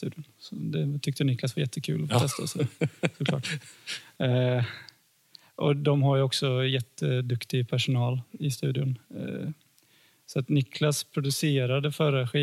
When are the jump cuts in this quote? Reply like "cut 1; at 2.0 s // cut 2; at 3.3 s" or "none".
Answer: none